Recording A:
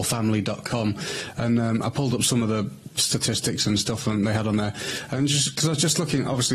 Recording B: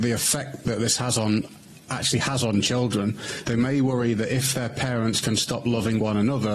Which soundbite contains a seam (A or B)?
B